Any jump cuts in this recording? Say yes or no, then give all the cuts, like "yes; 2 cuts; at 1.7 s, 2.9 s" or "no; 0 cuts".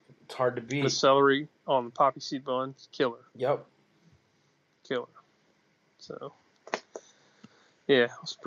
no; 0 cuts